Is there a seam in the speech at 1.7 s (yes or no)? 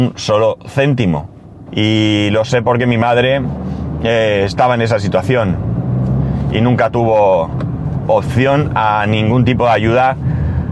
yes